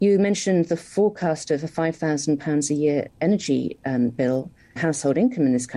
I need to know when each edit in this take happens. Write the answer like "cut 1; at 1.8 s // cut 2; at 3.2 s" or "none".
cut 1; at 4.8 s